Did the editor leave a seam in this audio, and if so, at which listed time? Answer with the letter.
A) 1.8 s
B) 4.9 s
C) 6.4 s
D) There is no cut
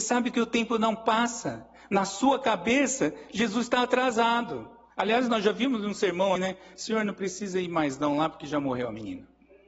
C